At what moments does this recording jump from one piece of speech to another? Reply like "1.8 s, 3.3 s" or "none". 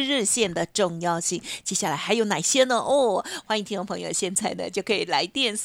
none